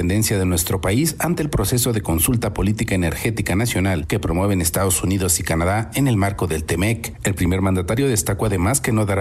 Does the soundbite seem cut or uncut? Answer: uncut